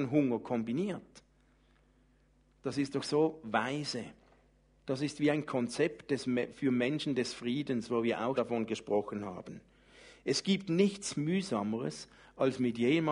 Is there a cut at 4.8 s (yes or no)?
yes